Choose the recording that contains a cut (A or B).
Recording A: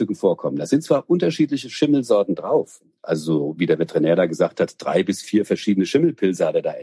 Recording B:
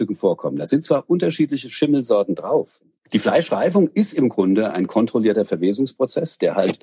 B